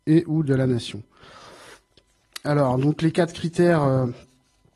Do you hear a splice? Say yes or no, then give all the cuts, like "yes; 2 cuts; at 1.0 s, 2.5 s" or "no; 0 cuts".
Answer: no; 0 cuts